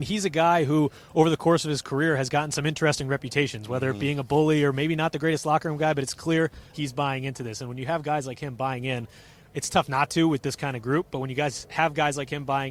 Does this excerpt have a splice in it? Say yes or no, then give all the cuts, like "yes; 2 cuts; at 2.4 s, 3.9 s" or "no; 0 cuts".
yes; 1 cut; at 6.7 s